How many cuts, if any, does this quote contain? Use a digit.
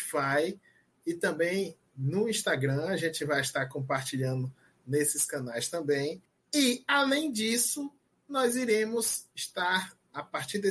0